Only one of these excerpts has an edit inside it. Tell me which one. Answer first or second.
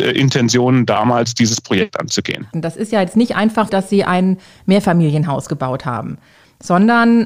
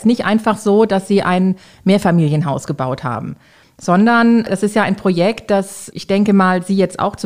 first